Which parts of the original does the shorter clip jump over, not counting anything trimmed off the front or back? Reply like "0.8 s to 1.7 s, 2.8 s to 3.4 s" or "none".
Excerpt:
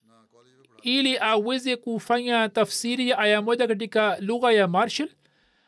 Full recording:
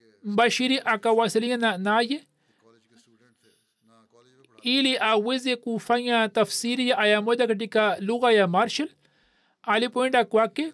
none

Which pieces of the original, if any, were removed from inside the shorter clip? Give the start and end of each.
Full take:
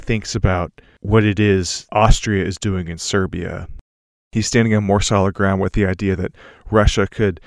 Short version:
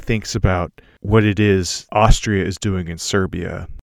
none

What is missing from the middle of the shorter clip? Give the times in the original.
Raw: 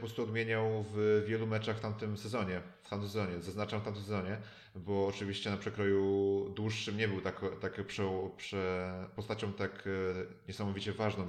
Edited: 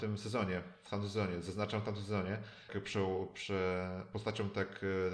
4.7 s to 7.7 s

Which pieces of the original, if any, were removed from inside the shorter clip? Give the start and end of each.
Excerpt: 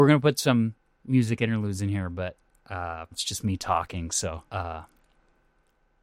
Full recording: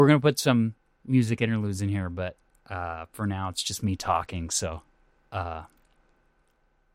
3.1 s to 3.5 s, 4.9 s to 5.3 s

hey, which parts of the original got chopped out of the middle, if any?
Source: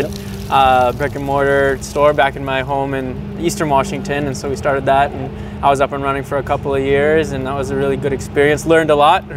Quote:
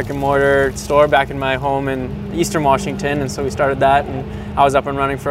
none

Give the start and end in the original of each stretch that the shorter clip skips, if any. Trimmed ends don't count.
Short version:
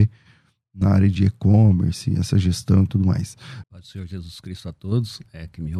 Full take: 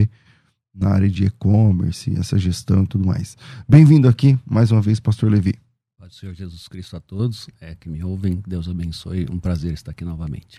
3.6 s to 5.9 s

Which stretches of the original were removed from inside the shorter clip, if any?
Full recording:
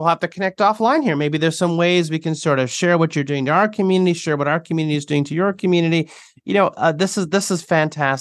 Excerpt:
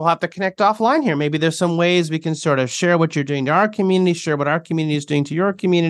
none

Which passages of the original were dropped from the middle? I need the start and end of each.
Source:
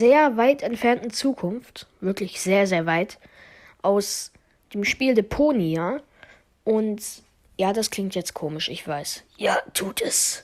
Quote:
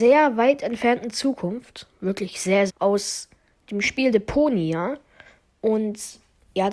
2.7 s to 3.7 s

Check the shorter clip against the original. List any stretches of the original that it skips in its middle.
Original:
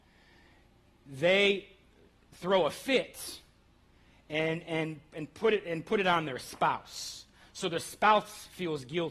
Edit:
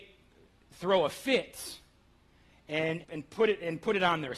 4.6 s to 5.1 s

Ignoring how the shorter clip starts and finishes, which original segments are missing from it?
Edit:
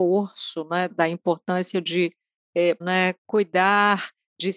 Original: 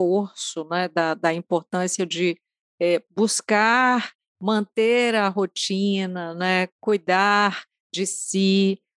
0.9 s to 1.1 s, 3.0 s to 6.3 s

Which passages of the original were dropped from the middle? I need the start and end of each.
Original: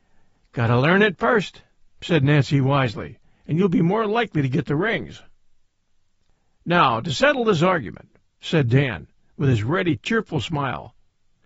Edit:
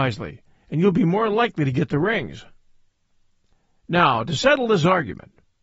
none

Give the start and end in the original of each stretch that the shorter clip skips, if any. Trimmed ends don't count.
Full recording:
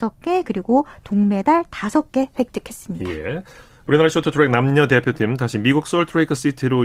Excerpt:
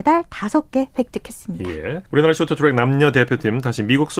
3.5 s to 3.8 s

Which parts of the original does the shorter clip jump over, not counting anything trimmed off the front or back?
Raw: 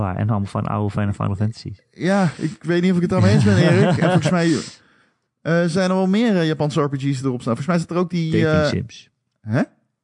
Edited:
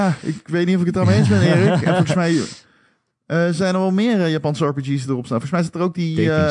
none

